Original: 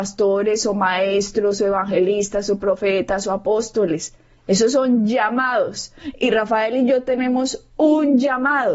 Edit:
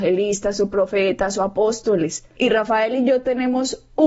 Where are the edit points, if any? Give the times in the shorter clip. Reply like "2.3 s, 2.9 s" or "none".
2.4 s